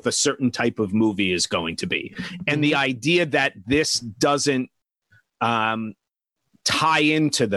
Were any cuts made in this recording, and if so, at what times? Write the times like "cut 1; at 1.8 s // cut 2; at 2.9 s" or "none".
none